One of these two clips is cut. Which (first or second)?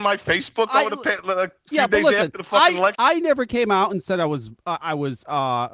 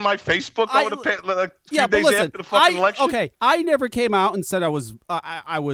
first